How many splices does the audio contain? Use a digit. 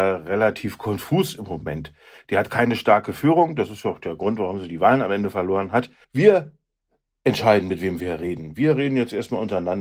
1